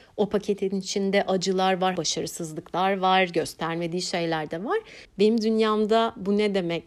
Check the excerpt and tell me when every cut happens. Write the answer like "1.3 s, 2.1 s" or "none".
2.0 s, 5.0 s

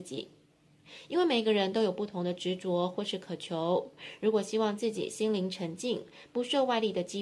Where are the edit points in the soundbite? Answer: none

